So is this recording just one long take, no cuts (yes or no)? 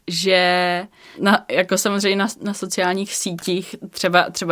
yes